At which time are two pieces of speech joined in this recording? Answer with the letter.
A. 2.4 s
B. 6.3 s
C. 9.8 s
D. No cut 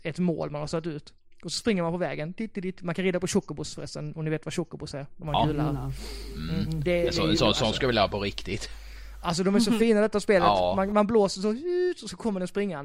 D